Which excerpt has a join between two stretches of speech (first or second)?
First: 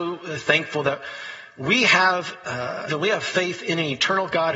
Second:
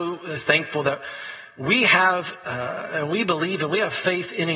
first